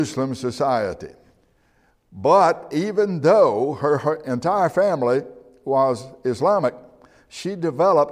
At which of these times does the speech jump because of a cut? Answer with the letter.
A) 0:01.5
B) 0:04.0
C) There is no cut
C